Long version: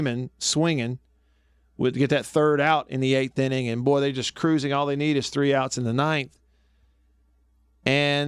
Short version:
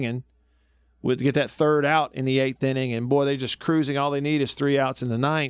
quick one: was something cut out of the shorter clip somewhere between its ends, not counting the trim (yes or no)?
no